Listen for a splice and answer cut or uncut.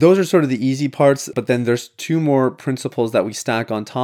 cut